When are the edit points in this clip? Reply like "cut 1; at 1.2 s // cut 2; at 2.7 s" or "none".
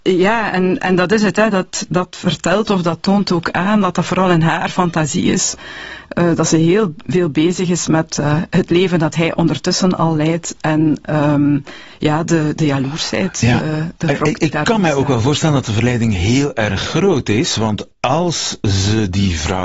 none